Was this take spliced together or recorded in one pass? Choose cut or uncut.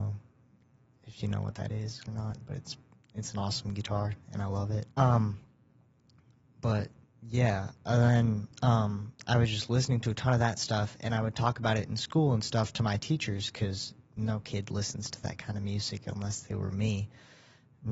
cut